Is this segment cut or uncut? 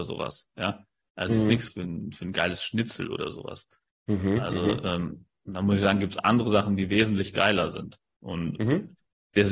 cut